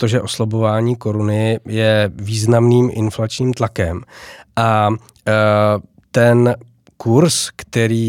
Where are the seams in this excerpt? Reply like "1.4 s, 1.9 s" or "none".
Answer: none